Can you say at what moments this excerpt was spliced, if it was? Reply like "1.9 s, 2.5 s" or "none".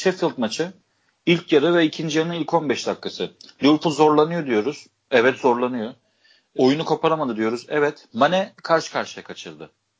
6.6 s, 8.1 s